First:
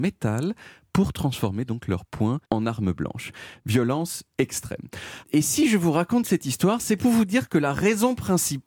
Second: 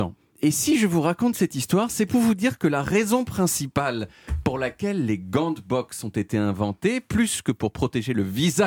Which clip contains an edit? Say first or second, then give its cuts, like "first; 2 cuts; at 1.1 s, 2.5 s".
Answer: first; 2 cuts; at 2.4 s, 5.2 s